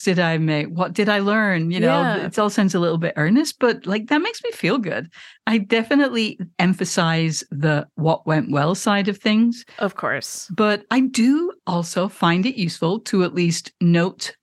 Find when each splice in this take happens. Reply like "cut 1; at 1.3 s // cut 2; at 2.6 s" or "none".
none